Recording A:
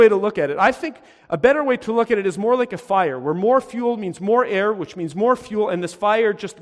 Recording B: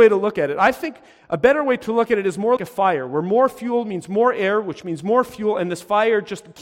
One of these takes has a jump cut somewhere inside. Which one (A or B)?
B